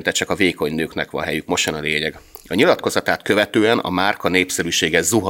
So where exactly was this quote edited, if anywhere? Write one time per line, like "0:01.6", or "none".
none